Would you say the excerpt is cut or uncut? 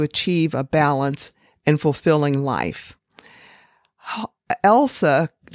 uncut